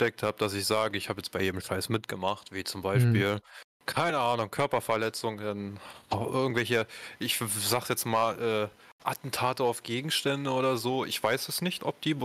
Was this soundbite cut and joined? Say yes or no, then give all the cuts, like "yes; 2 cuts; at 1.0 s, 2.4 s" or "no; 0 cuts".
no; 0 cuts